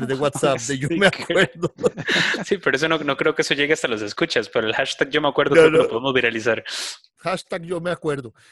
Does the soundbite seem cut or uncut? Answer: cut